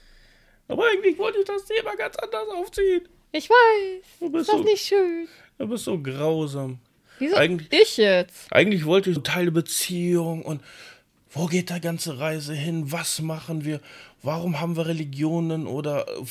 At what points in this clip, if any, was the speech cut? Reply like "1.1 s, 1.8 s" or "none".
9.2 s